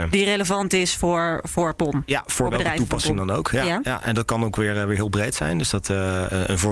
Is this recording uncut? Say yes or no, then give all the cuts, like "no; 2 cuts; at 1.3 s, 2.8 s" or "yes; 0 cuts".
yes; 0 cuts